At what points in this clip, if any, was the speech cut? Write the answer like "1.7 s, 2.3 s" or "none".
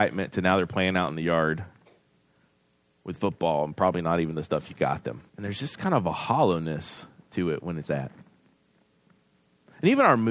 5.3 s, 7.9 s

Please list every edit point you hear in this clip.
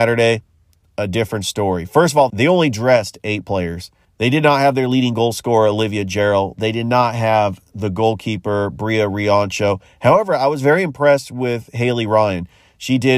2.3 s

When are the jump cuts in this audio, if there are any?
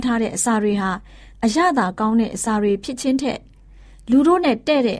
none

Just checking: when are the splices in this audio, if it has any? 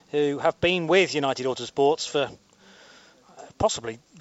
none

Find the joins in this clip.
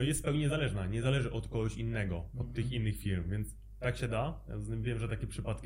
none

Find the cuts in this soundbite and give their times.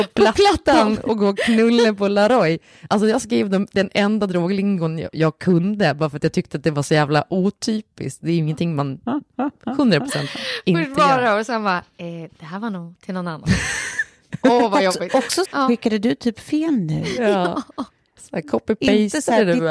15.5 s

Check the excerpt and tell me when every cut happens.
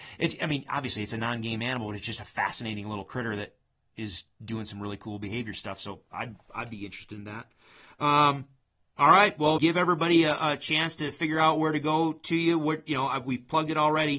9.6 s

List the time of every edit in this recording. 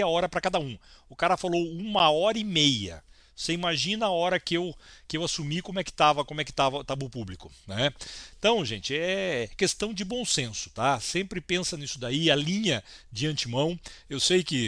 none

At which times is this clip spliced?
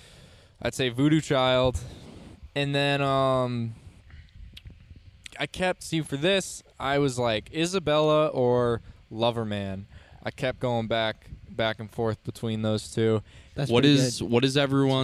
5.3 s, 13.5 s

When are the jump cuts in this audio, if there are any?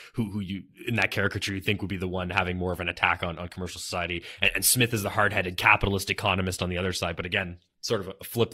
none

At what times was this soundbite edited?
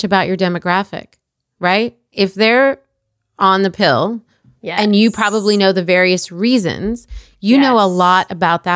none

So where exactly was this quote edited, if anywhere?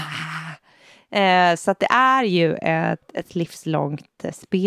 none

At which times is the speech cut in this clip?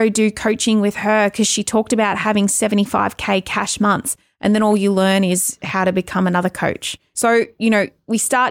7.1 s

